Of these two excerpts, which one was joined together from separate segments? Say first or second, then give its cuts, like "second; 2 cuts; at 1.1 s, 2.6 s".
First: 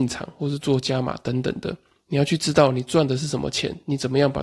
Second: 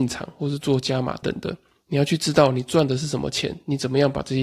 second; 1 cut; at 1.2 s